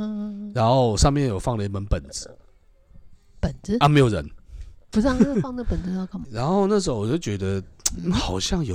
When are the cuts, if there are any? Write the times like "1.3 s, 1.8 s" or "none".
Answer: 4.9 s, 6.2 s